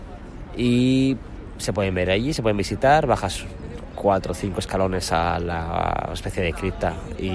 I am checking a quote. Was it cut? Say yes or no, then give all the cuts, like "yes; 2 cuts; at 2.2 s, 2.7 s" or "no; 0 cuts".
no; 0 cuts